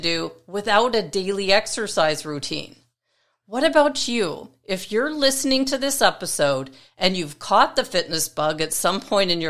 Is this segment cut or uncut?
uncut